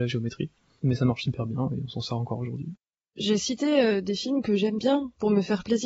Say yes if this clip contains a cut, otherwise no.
yes